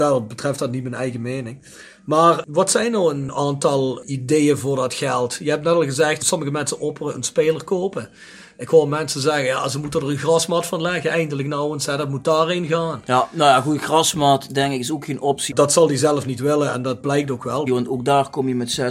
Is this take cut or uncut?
cut